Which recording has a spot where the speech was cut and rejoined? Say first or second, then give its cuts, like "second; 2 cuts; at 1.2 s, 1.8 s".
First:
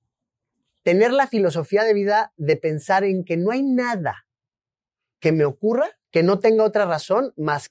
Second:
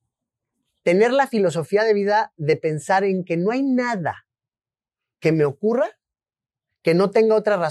first; 1 cut; at 6.0 s